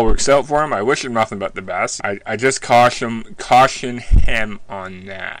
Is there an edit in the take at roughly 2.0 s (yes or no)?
yes